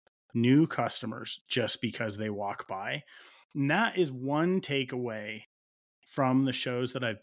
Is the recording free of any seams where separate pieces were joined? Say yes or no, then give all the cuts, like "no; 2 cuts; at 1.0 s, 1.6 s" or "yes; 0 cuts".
yes; 0 cuts